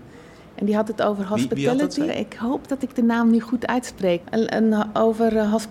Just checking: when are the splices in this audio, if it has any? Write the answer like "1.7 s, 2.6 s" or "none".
2.1 s, 4.2 s